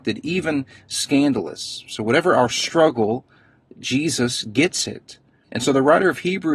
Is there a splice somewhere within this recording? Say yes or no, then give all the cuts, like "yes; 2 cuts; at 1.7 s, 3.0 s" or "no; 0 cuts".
yes; 1 cut; at 5.5 s